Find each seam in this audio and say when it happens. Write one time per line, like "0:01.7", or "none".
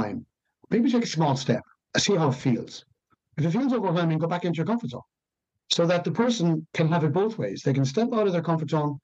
0:05.5